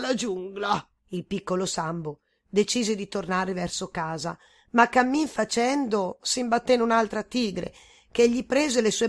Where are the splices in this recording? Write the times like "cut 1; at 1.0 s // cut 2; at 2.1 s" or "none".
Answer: cut 1; at 1.0 s // cut 2; at 6.2 s